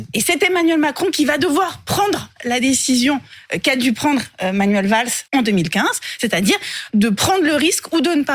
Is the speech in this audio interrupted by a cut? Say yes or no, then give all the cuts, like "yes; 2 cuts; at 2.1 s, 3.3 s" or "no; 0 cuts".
yes; 2 cuts; at 5.3 s, 6.9 s